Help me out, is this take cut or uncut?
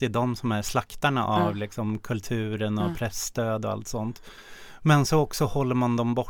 uncut